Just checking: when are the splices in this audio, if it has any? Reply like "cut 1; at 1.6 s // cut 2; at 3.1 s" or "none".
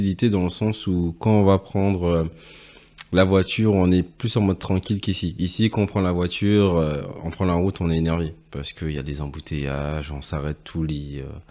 none